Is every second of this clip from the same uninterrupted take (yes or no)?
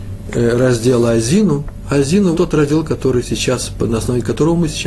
no